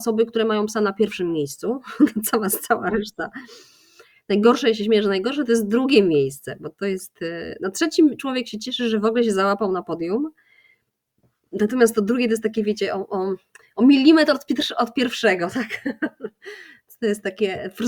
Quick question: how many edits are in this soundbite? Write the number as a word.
zero